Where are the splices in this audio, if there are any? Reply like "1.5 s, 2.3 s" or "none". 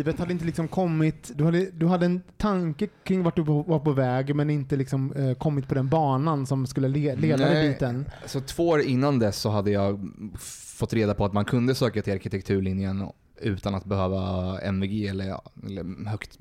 1.3 s